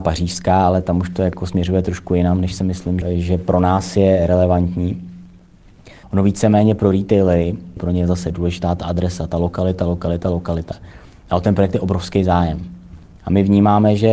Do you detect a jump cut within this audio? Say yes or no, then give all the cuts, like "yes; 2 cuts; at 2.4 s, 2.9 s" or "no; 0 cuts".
yes; 3 cuts; at 3.0 s, 6.0 s, 7.8 s